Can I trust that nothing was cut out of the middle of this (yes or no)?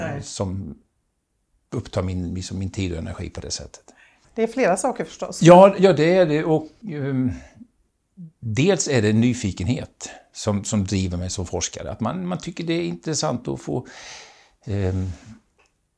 no